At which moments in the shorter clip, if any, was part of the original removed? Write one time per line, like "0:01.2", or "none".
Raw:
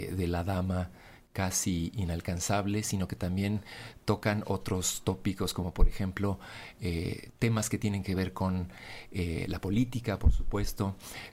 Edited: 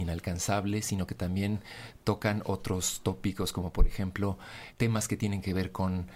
0:04.7